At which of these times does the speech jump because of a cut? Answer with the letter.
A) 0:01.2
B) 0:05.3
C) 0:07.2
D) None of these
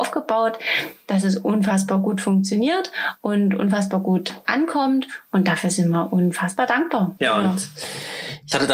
C